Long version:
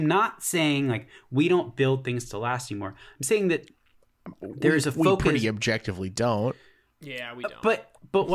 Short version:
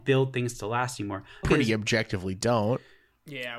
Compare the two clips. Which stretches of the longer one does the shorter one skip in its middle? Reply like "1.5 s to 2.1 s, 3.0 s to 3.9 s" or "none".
3.1 s to 5.2 s